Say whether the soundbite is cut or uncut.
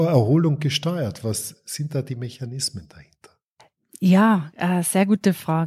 uncut